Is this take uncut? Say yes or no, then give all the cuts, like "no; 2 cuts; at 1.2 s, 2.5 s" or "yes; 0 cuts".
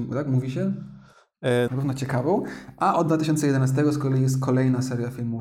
no; 1 cut; at 1.7 s